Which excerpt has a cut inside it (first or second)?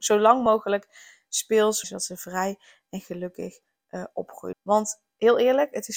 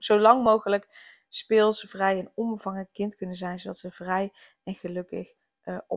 first